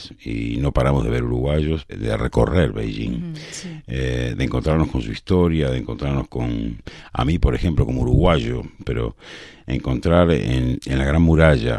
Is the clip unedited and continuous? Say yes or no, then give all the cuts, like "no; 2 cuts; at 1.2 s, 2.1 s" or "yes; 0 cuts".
no; 3 cuts; at 1.9 s, 8.8 s, 10.8 s